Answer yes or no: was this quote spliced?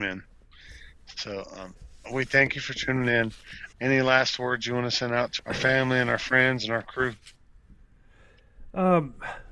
yes